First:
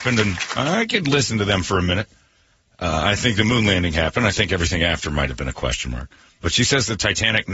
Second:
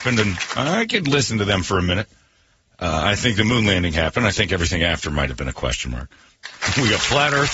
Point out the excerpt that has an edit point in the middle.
second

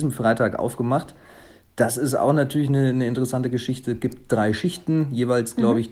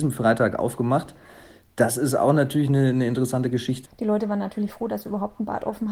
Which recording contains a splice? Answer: second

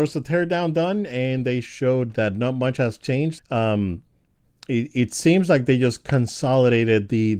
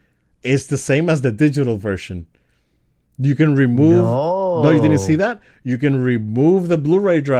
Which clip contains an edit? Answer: first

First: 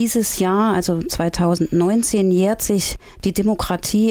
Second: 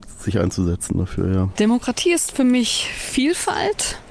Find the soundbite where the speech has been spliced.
second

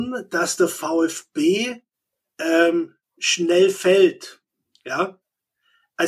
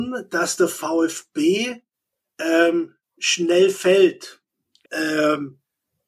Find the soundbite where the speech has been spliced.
second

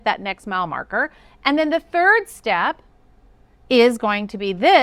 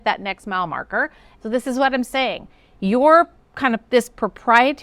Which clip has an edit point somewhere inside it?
second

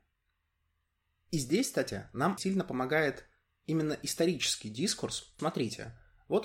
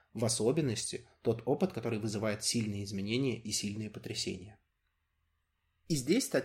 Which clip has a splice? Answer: first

